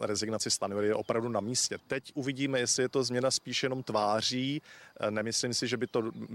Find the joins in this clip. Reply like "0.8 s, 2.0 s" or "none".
1.8 s